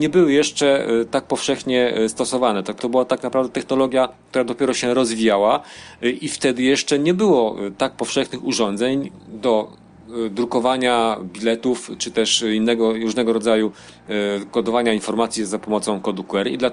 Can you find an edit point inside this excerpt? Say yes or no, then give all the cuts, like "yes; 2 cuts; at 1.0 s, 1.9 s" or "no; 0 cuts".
yes; 1 cut; at 2.8 s